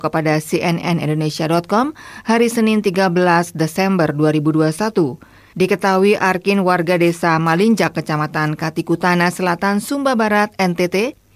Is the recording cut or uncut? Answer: cut